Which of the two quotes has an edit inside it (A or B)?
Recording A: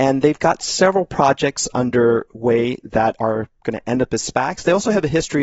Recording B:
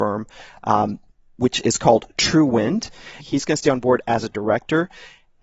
B